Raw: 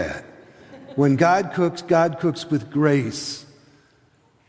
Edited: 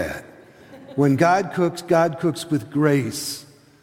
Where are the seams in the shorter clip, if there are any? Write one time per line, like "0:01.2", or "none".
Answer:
none